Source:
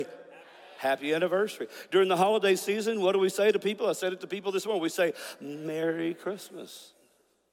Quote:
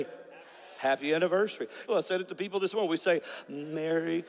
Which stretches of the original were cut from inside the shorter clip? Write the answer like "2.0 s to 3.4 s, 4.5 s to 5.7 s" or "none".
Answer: 1.9 s to 3.8 s

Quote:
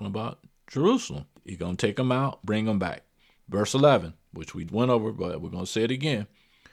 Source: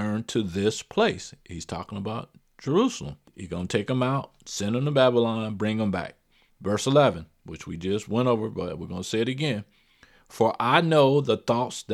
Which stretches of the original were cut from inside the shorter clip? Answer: 4.3 s to 5.6 s, 7.8 s to 8.0 s

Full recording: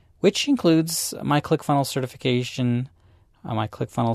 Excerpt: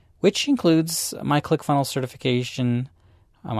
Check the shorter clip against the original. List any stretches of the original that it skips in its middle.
none

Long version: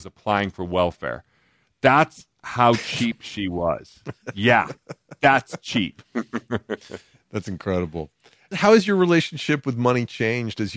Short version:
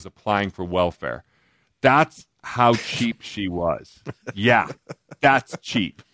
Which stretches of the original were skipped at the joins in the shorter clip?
none

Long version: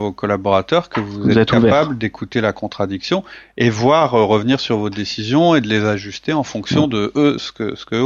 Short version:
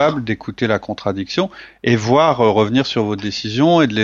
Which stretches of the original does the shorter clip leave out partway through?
none

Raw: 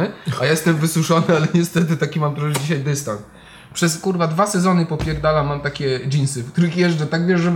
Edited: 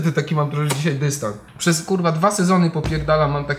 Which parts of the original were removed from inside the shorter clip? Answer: 3.3 s to 3.6 s

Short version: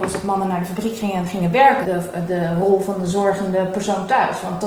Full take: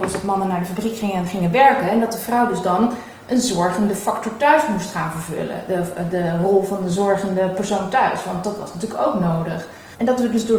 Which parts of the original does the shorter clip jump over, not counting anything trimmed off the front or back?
1.8 s to 5.7 s

